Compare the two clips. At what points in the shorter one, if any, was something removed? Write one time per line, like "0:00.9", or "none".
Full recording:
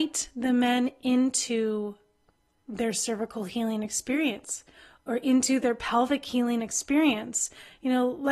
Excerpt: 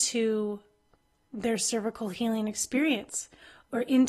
none